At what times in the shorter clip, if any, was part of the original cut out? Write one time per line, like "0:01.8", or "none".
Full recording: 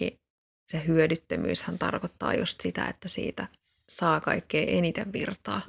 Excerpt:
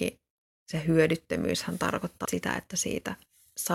0:02.3